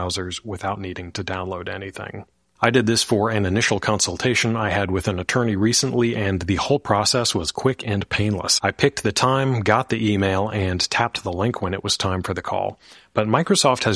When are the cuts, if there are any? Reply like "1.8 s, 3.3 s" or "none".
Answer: none